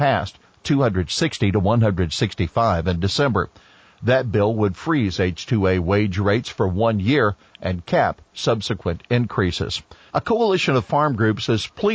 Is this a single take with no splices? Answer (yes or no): no